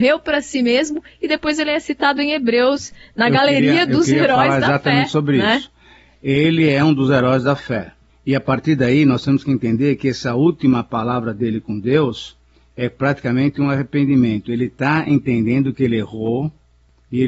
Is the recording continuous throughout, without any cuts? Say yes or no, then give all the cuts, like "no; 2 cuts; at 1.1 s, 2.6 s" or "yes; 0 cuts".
yes; 0 cuts